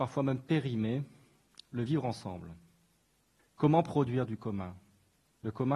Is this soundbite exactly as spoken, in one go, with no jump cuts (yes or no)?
no